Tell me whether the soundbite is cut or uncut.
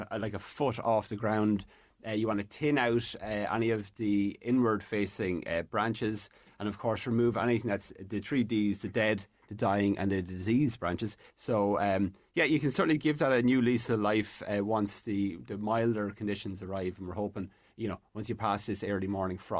cut